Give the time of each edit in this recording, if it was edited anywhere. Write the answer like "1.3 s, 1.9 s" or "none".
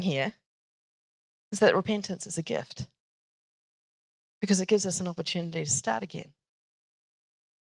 none

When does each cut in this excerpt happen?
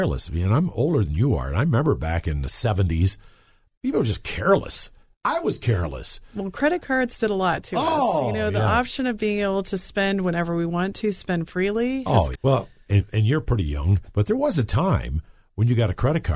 12.4 s

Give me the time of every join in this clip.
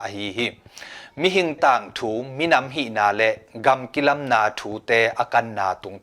1.6 s

